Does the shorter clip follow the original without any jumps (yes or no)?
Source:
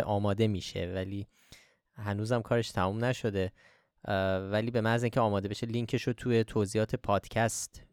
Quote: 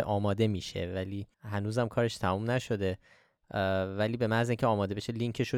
no